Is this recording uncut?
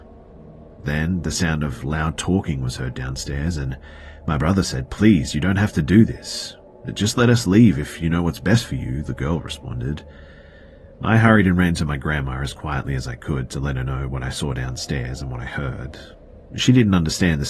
yes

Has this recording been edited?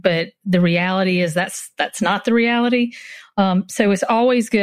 no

